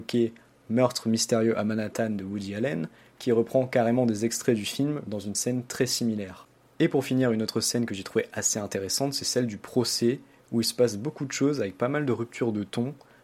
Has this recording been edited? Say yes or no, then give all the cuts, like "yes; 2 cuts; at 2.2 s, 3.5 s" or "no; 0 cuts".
no; 0 cuts